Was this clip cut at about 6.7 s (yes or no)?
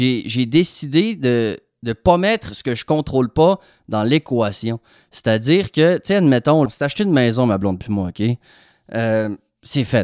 yes